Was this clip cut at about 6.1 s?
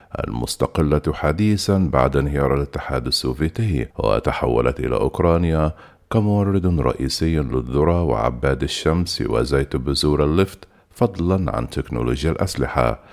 no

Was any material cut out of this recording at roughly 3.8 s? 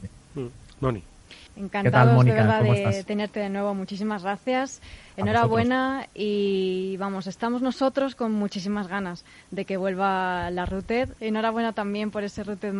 no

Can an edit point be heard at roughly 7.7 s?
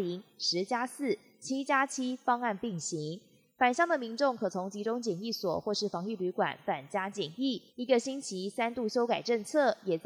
yes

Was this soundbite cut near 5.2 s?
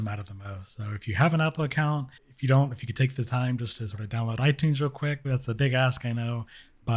yes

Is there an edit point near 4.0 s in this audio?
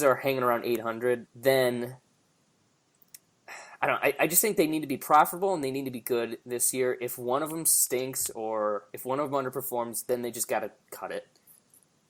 no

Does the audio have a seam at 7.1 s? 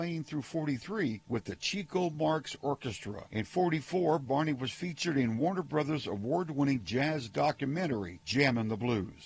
no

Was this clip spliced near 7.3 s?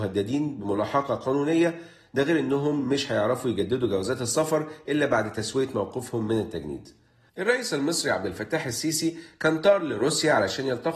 yes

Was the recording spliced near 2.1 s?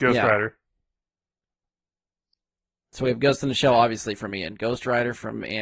no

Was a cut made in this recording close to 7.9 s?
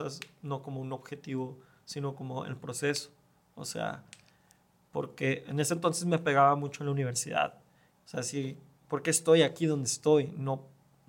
yes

